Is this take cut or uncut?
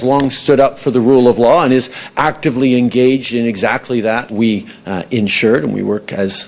uncut